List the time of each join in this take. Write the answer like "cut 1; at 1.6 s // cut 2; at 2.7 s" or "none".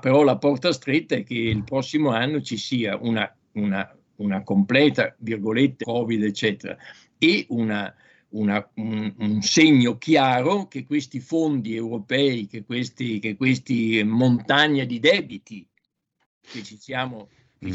cut 1; at 5.8 s